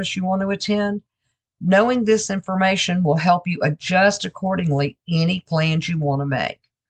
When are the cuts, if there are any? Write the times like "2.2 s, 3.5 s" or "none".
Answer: none